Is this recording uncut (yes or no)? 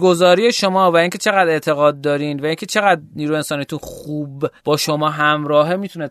no